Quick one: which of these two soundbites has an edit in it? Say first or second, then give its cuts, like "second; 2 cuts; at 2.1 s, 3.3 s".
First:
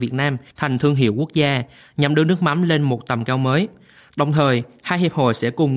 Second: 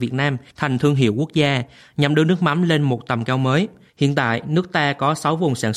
second; 1 cut; at 3.9 s